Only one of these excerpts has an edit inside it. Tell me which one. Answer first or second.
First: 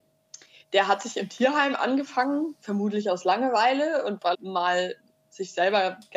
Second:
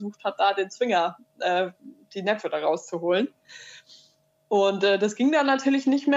first